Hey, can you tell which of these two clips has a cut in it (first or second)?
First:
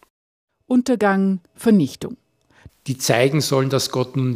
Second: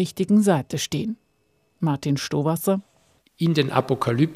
first